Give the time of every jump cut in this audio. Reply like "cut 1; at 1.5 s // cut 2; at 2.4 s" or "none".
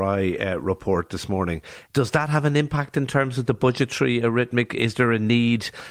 cut 1; at 1.8 s